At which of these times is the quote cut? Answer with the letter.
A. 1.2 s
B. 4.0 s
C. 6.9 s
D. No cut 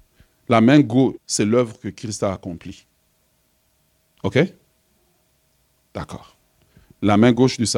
A